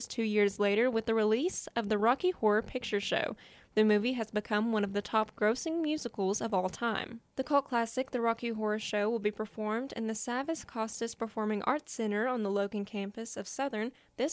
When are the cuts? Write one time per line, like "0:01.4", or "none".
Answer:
none